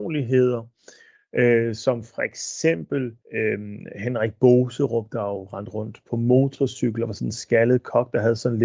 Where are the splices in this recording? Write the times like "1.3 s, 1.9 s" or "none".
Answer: 3.2 s